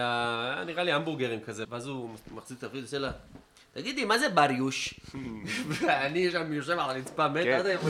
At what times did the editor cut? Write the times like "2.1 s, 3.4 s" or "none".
1.6 s